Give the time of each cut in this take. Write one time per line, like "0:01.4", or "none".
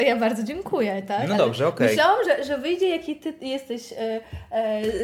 none